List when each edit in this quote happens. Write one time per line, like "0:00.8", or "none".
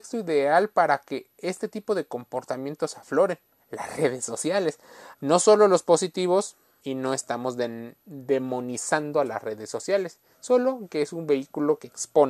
0:05.1
0:06.8

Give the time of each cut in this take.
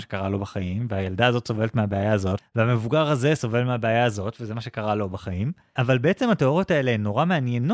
0:02.4
0:05.8

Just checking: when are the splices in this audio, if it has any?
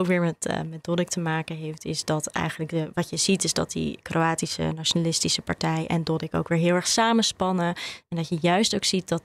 0:08.0

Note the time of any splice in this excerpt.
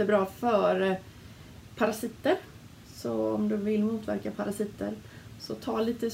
0:01.7

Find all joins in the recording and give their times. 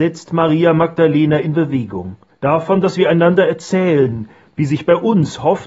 0:02.3

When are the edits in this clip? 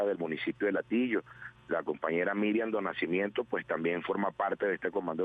none

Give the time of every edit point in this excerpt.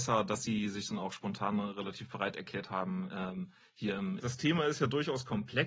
0:04.2

